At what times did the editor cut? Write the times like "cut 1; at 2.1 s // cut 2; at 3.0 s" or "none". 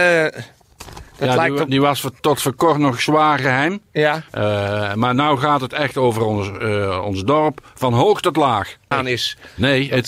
cut 1; at 4.3 s // cut 2; at 8.9 s